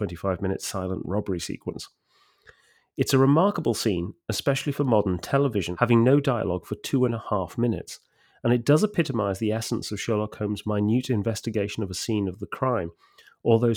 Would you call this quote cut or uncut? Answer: uncut